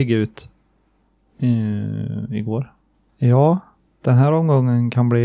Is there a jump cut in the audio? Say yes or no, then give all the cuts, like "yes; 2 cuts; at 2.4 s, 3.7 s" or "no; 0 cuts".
yes; 1 cut; at 3.1 s